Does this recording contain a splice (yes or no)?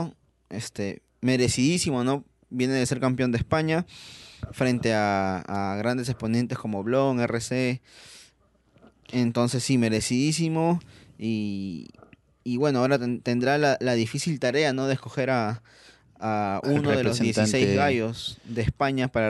no